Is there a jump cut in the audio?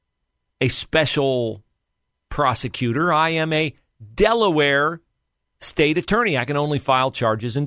no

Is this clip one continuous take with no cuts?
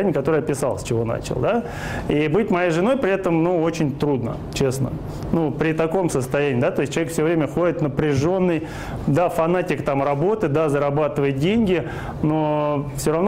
yes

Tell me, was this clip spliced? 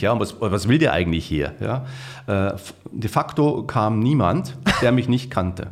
no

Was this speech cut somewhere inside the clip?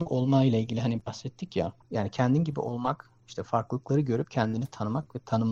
no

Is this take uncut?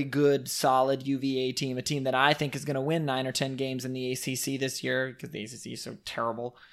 yes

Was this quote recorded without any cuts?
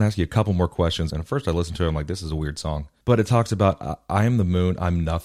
no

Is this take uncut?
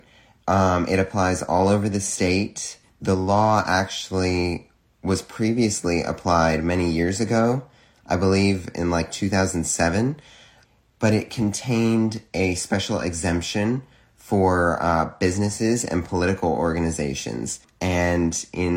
yes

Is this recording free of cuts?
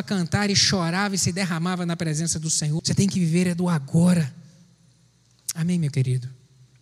no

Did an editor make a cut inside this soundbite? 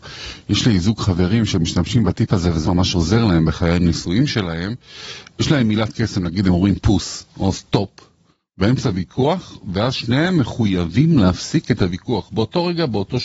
yes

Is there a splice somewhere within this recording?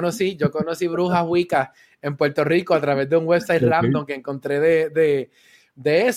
no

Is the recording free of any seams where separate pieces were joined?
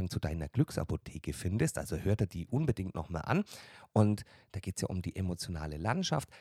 yes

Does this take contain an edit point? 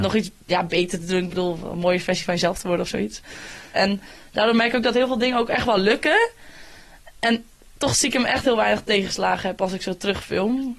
yes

